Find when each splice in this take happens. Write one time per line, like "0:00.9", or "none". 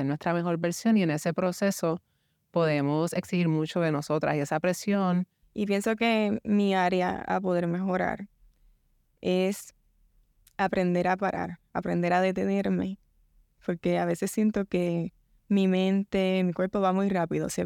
0:05.4